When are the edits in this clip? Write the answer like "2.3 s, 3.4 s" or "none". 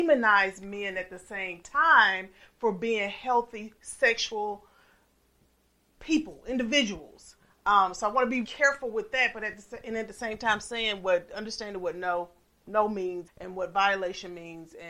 8.4 s, 13.3 s

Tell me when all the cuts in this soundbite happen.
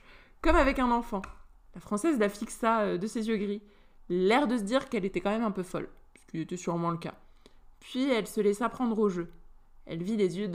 none

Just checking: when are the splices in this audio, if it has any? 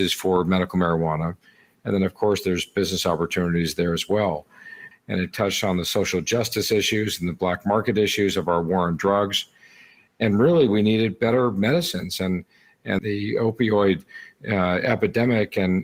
4.9 s, 13.0 s

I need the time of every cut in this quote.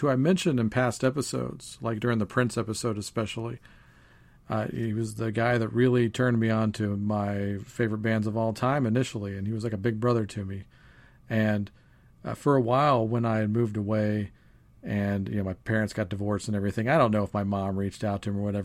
none

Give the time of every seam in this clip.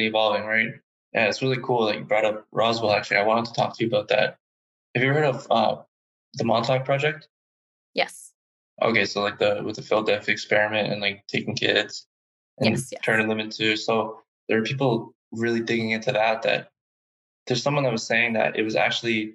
0.9 s

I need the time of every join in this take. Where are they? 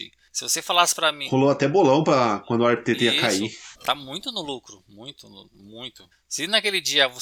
3.7 s, 6.1 s

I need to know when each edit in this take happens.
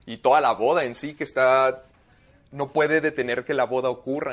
none

